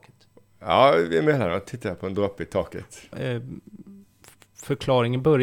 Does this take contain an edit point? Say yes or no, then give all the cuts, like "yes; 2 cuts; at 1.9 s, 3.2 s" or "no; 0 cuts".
yes; 1 cut; at 3.1 s